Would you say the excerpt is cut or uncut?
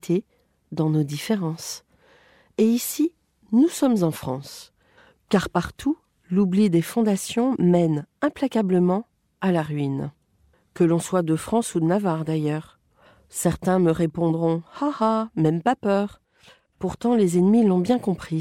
uncut